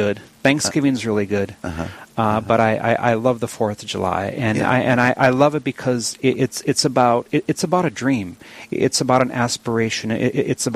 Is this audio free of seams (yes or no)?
yes